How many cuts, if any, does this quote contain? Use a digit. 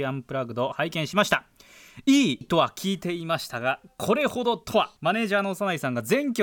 2